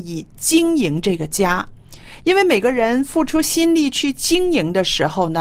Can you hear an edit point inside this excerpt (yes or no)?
no